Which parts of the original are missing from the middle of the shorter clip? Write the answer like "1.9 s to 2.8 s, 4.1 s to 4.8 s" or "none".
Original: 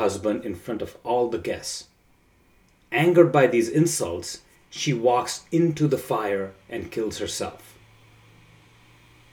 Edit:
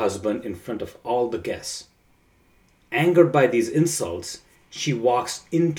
none